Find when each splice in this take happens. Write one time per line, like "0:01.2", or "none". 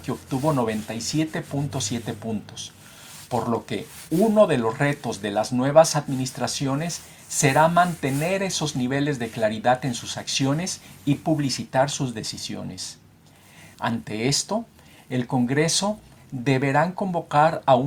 0:13.7
0:16.2